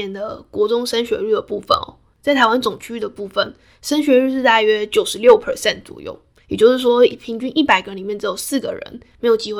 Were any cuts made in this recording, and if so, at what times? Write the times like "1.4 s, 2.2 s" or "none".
none